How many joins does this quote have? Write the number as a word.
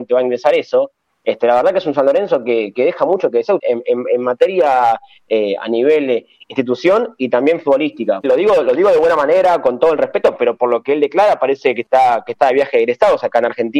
two